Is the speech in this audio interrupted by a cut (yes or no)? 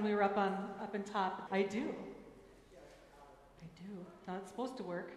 yes